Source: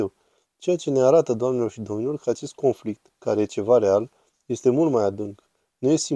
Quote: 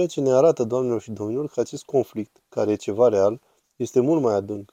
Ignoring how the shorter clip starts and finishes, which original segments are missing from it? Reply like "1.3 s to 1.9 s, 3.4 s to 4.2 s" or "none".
none

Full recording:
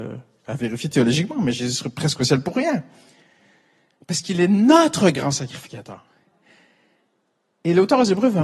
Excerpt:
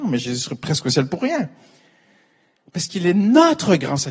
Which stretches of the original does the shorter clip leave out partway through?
none

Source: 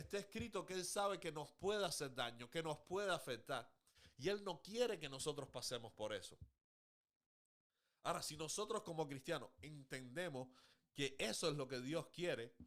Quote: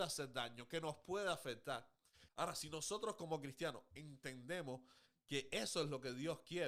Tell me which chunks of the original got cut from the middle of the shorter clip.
4.1 s to 8.0 s

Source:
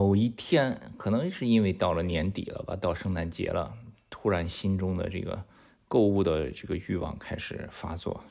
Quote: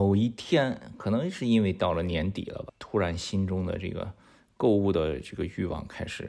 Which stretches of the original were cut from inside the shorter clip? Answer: 2.7 s to 4.0 s

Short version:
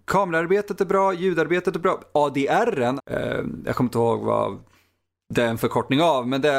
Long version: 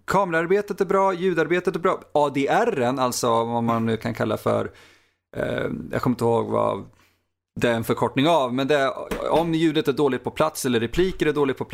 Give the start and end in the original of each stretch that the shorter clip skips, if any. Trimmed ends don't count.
3.0 s to 5.2 s

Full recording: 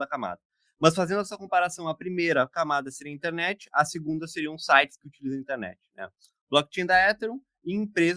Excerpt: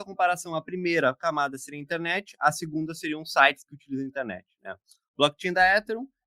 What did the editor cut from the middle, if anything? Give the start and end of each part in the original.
none

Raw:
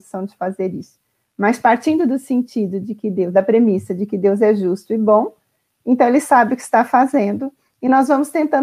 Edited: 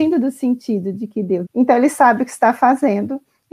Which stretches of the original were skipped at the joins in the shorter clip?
3.3 s to 5.8 s

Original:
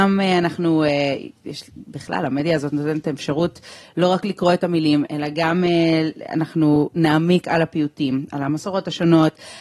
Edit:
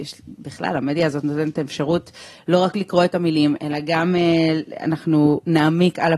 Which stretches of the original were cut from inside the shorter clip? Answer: none

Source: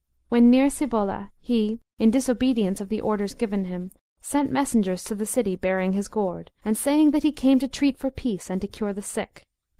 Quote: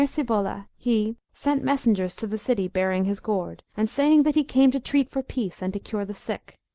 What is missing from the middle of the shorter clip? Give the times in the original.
1.9 s to 4.1 s

